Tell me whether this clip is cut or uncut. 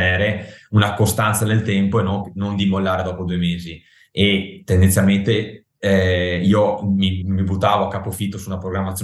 cut